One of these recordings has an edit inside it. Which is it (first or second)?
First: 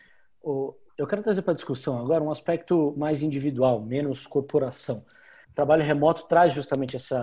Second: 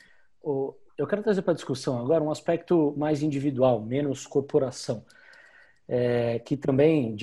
first